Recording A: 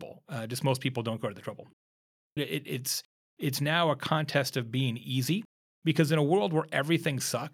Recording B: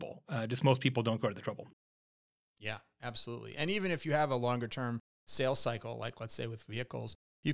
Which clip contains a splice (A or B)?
A